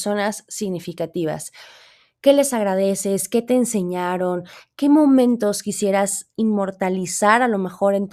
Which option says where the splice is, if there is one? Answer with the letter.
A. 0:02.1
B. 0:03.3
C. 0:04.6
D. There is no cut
D